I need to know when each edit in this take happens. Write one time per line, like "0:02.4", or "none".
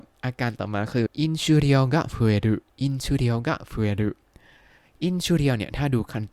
0:01.1
0:02.7